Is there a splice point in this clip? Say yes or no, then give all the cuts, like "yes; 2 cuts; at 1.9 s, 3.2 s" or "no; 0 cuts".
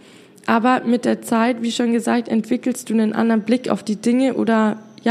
no; 0 cuts